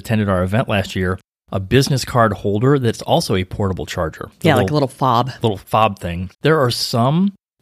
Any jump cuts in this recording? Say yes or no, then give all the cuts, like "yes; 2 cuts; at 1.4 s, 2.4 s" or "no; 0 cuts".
yes; 2 cuts; at 4.3 s, 6.3 s